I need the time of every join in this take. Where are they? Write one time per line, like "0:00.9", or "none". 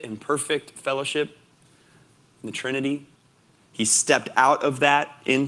none